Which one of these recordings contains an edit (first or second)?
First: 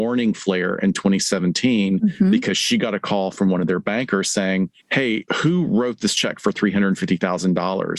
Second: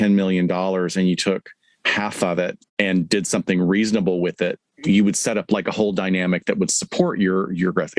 first